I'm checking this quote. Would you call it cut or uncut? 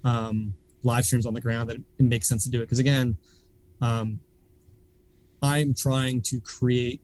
uncut